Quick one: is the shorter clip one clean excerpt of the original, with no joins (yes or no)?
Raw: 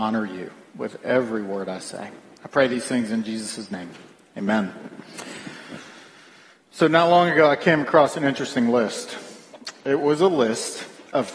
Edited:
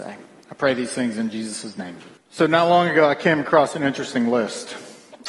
no